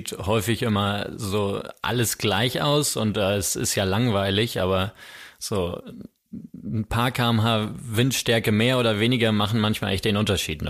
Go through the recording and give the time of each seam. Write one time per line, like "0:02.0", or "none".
none